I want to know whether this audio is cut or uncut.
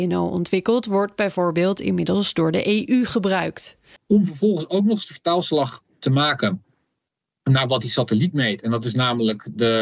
cut